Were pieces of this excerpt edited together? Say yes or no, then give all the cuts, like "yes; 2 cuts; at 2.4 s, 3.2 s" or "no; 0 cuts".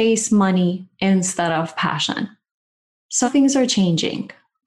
yes; 1 cut; at 3.2 s